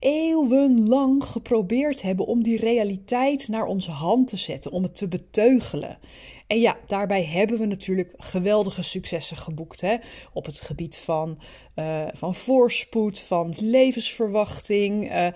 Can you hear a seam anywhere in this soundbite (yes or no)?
yes